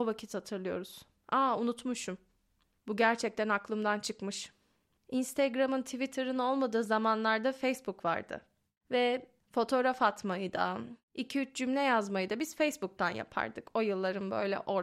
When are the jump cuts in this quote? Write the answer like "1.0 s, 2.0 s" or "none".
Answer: 4.9 s

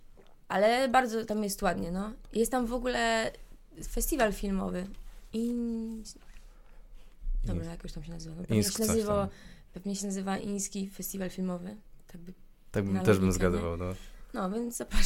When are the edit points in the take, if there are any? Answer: none

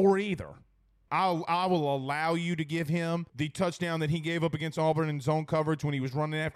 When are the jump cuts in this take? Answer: 1.1 s, 3.3 s

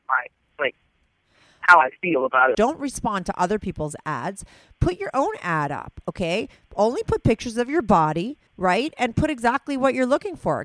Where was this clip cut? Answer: 2.5 s, 8.5 s

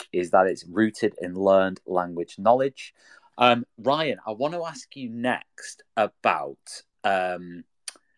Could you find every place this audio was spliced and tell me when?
3.2 s

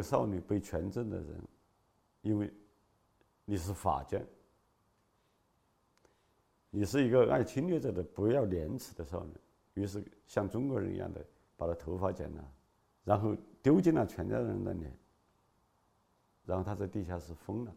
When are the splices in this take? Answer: 12.9 s, 16.4 s

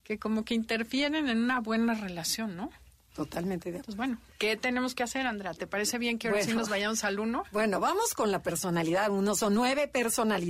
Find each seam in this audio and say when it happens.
none

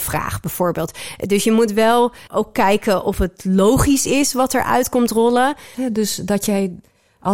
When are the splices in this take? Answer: 2.3 s, 5.7 s

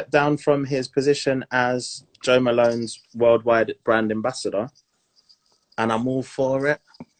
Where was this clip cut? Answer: 5.7 s

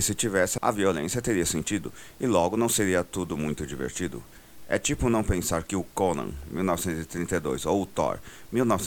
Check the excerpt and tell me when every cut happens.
none

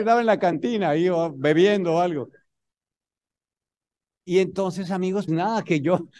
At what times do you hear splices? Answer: 5.3 s

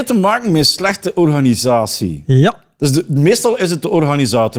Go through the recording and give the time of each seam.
none

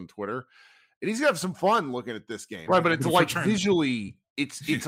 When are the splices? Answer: 2.7 s

